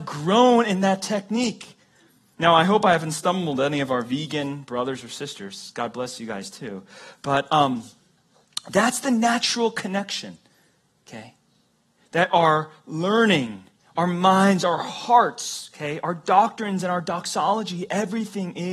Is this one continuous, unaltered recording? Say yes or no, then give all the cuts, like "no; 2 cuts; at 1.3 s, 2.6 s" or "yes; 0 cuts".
yes; 0 cuts